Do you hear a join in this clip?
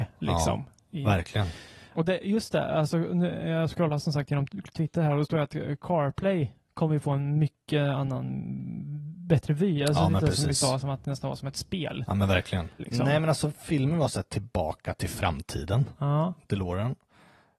yes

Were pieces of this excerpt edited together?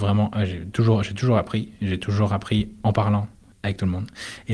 no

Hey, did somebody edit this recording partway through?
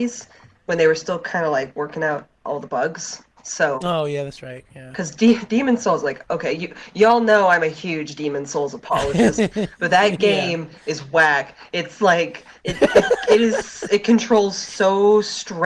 no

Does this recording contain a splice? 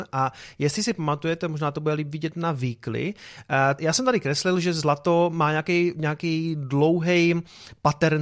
yes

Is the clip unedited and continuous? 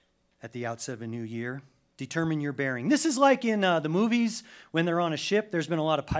yes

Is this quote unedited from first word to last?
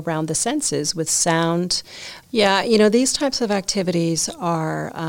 no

